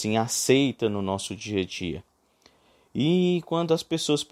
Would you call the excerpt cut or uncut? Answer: uncut